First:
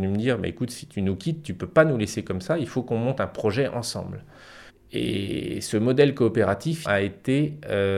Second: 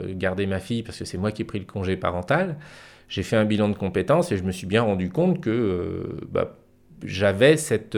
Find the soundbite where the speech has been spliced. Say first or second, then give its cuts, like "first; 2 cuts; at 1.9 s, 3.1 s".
first; 2 cuts; at 4.7 s, 6.8 s